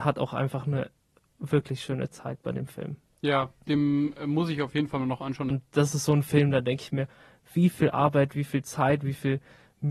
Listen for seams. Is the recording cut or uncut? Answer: cut